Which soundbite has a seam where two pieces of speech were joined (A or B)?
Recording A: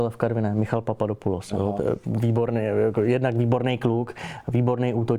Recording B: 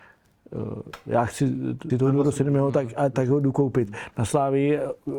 B